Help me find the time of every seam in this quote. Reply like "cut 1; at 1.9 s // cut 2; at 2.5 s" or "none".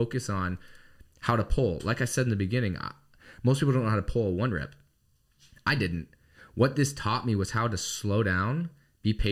none